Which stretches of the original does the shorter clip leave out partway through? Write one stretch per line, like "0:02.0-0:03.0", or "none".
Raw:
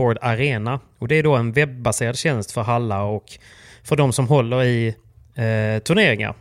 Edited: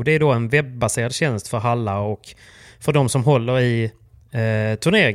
none